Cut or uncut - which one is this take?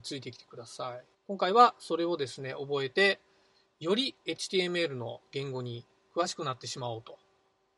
cut